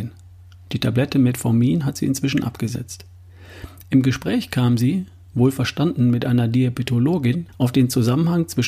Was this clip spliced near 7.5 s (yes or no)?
yes